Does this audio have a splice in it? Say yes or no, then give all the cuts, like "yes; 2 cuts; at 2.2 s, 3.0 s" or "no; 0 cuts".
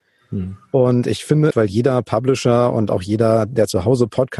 yes; 1 cut; at 1.5 s